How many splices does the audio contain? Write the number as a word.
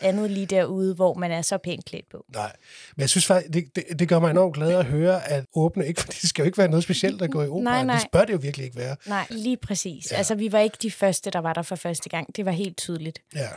two